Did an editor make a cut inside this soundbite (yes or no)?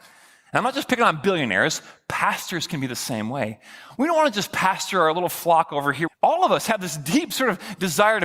yes